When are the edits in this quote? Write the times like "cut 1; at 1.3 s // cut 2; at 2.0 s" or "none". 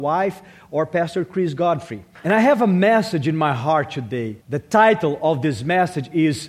cut 1; at 4.4 s

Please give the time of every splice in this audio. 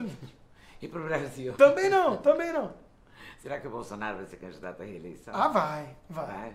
none

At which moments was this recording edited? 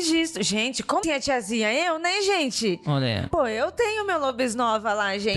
cut 1; at 1.0 s

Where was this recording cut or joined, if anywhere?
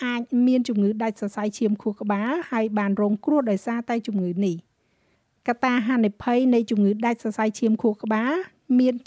none

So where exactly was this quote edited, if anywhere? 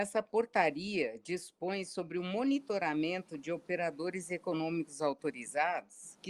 none

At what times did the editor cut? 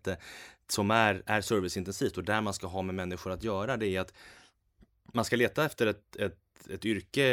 none

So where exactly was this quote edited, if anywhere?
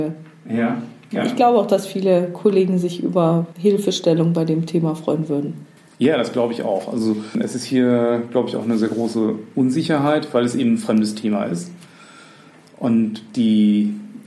none

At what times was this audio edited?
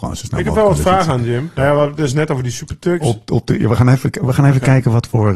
cut 1; at 1.6 s // cut 2; at 3.0 s

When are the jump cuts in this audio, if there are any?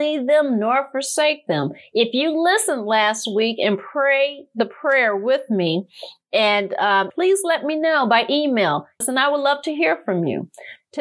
cut 1; at 7.1 s // cut 2; at 9.0 s

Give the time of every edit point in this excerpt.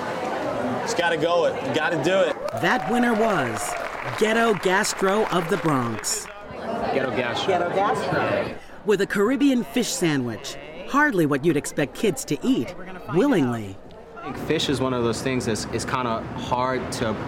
none

